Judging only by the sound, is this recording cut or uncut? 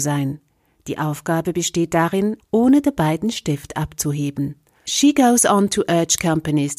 cut